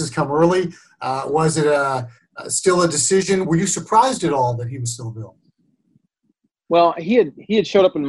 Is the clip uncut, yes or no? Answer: yes